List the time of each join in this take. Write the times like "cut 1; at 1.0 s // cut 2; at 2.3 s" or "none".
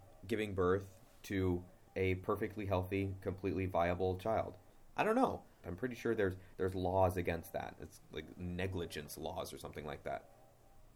cut 1; at 5.6 s